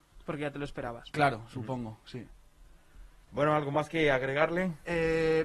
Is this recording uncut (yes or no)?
no